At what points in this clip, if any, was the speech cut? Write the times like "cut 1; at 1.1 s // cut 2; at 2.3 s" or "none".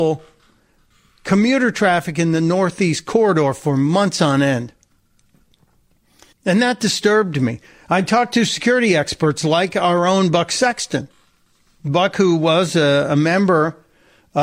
cut 1; at 6.3 s